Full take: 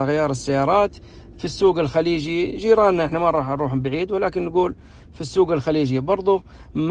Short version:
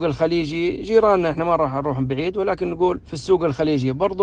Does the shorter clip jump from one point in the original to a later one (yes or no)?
yes